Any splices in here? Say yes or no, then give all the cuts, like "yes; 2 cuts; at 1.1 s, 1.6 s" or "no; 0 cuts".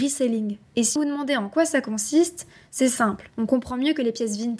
yes; 2 cuts; at 1.0 s, 3.3 s